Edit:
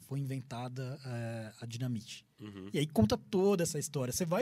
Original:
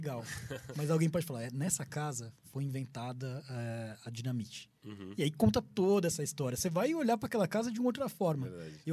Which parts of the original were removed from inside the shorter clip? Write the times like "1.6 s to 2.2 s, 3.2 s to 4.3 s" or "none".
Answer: none